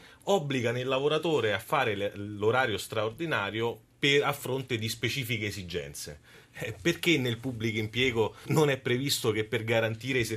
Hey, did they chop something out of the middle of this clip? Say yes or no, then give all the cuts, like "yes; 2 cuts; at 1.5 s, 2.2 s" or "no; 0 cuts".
yes; 1 cut; at 8.5 s